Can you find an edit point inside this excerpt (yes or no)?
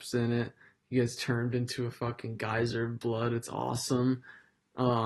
no